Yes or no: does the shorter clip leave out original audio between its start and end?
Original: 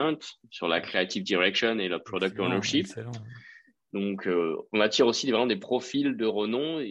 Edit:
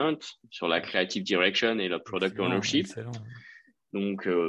no